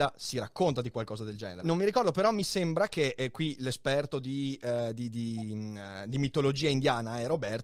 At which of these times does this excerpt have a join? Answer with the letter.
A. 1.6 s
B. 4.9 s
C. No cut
A